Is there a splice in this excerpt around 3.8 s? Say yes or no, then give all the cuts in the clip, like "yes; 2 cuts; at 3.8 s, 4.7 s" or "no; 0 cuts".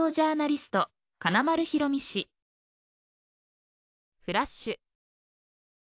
no; 0 cuts